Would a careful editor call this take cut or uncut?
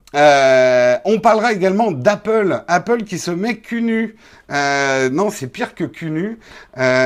uncut